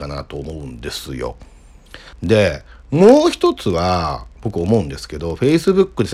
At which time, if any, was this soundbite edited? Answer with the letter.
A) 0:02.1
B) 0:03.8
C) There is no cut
A